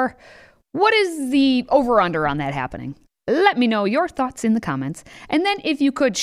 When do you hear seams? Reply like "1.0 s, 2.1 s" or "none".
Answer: none